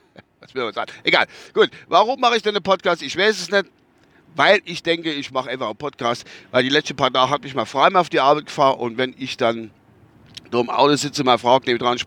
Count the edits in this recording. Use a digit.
0